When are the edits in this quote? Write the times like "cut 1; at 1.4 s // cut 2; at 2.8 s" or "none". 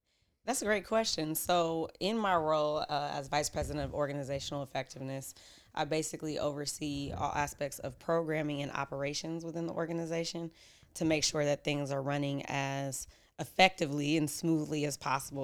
none